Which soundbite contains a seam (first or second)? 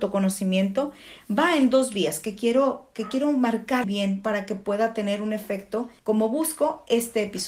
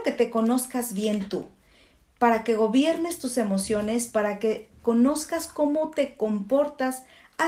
first